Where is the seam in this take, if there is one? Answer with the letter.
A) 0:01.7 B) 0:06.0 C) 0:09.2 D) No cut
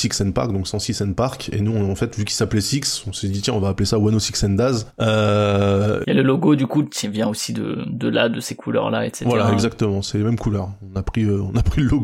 B